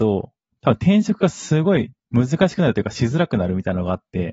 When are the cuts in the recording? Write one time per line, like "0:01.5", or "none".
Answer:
0:02.0